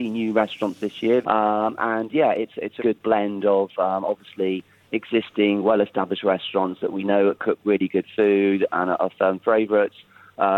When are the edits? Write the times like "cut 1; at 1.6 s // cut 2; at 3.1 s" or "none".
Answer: cut 1; at 1.2 s // cut 2; at 2.8 s